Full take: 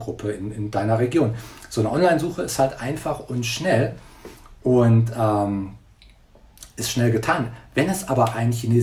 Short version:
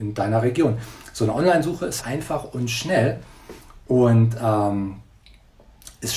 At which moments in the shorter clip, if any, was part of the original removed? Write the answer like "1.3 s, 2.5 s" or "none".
2.0 s